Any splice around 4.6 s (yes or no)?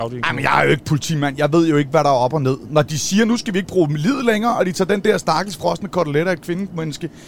no